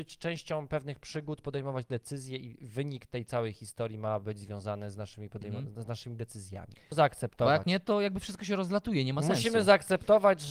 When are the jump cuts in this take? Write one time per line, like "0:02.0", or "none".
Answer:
0:06.9